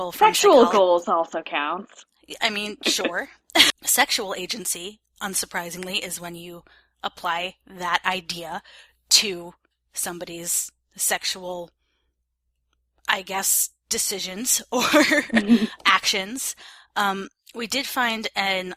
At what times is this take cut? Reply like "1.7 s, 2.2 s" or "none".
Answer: 3.7 s